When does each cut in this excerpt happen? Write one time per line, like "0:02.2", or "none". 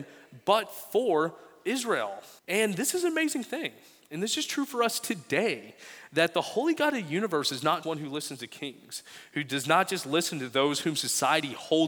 0:02.4
0:07.8